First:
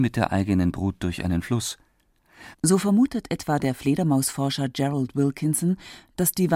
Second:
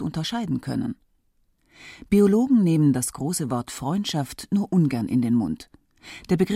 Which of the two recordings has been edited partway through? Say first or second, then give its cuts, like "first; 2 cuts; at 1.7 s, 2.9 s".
first; 1 cut; at 2.5 s